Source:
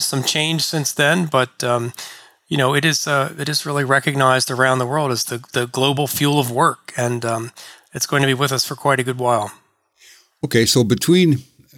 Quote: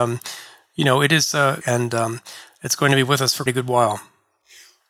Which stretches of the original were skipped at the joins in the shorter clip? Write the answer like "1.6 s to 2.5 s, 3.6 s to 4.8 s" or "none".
3.3 s to 6.9 s, 8.8 s to 9.0 s